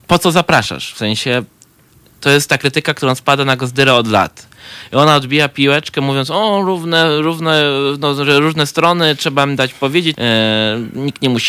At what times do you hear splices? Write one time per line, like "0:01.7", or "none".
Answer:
0:10.1